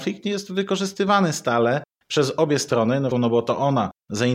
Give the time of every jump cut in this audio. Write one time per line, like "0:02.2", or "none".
0:03.1